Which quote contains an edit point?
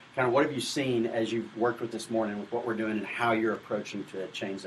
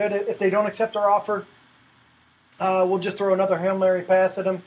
first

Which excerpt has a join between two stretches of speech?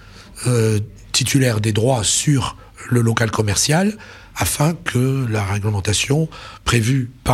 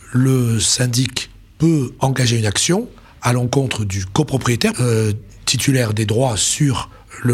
second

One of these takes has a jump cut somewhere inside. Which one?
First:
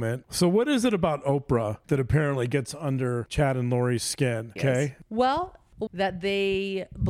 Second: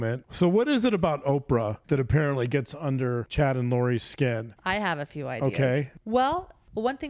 first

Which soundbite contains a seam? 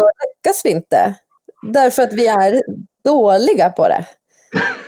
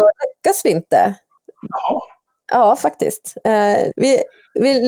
second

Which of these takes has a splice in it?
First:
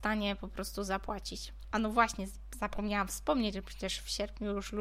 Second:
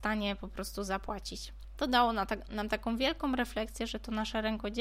first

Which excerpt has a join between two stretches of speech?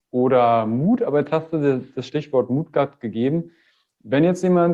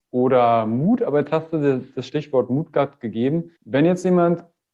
second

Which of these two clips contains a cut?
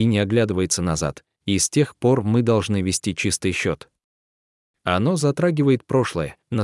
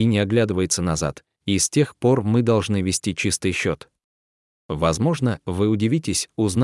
second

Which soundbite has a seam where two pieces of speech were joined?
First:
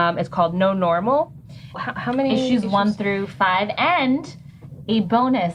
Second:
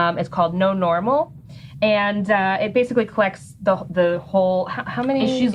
first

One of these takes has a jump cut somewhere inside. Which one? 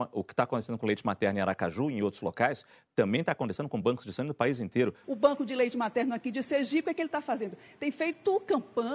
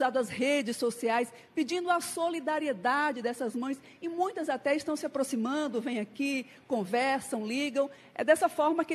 first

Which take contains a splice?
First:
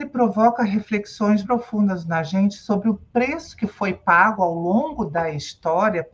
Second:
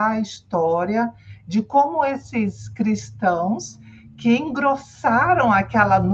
first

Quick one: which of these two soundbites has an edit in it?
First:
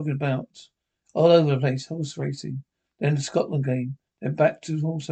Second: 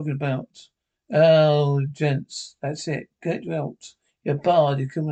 first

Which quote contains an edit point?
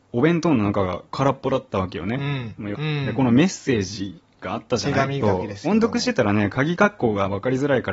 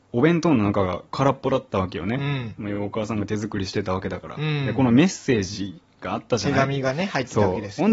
first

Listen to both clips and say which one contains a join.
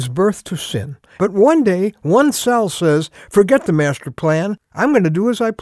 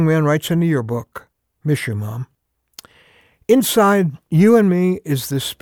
first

